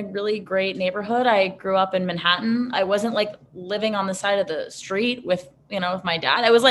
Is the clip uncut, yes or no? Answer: no